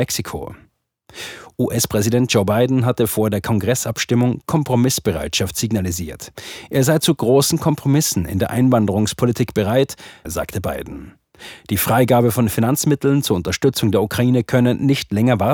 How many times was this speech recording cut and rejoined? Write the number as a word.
one